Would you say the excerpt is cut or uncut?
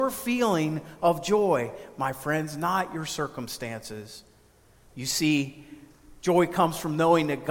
cut